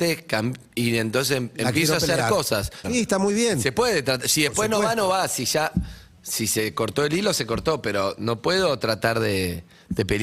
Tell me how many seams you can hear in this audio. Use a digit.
1